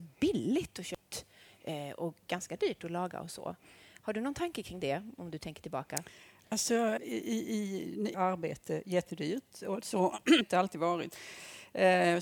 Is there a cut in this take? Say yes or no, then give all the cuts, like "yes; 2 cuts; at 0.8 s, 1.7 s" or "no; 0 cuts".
yes; 2 cuts; at 7.0 s, 8.1 s